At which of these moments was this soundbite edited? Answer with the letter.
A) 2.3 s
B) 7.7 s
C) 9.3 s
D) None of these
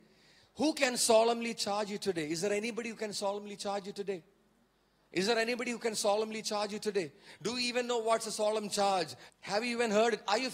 C